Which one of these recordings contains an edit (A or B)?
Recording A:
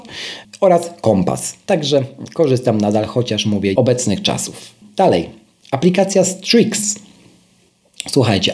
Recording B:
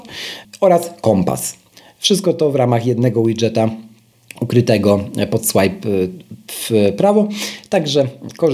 A